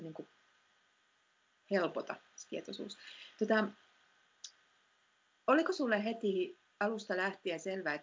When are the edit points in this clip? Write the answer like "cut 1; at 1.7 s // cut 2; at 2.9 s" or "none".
none